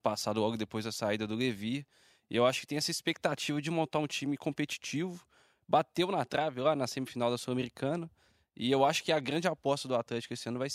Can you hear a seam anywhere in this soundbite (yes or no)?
no